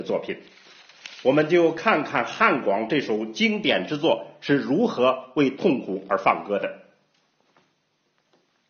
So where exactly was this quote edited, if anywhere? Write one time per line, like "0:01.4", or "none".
none